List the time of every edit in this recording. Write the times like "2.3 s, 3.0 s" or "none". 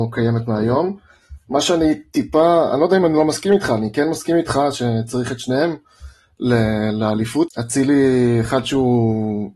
7.5 s

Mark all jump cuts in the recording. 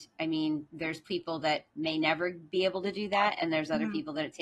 none

